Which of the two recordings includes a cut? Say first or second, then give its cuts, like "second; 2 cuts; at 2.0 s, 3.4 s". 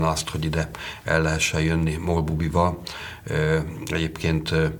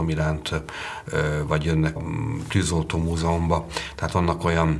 second; 1 cut; at 2.0 s